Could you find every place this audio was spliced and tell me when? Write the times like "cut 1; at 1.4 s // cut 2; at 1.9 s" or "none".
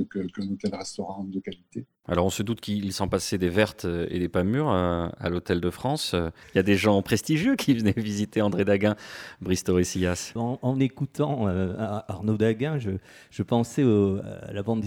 cut 1; at 10.4 s